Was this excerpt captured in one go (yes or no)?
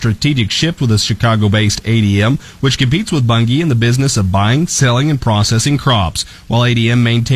yes